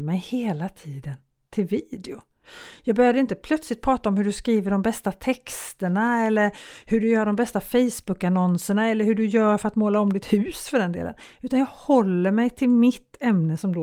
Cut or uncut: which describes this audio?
uncut